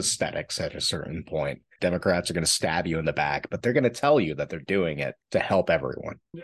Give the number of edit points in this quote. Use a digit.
2